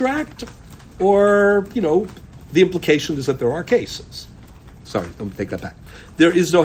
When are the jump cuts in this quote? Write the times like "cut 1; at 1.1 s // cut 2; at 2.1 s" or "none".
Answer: cut 1; at 4.8 s